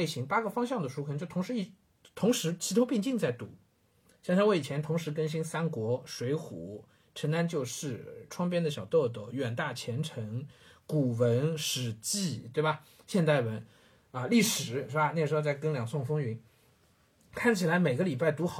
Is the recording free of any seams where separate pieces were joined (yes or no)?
yes